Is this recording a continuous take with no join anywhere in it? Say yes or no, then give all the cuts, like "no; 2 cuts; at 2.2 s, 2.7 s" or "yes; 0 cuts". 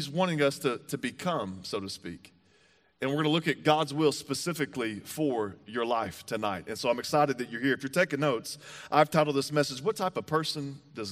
yes; 0 cuts